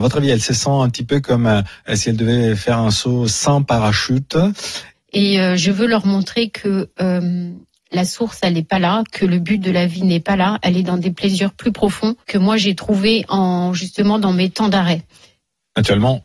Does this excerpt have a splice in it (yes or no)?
yes